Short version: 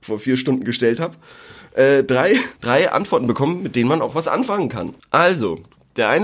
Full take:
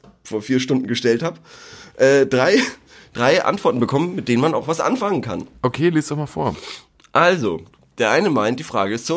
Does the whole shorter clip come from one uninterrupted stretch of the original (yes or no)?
no